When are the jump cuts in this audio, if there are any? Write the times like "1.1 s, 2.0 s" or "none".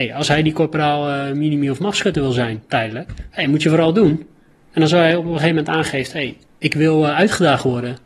none